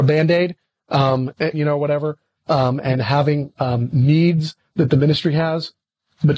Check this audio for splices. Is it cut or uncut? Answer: cut